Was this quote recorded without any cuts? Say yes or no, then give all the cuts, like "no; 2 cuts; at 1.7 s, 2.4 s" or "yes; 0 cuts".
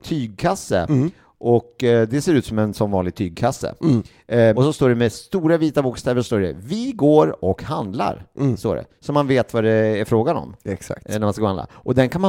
no; 1 cut; at 4.5 s